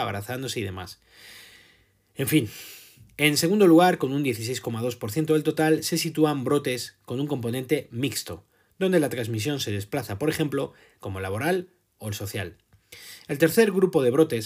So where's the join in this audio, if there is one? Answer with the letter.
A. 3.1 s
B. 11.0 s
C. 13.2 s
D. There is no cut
B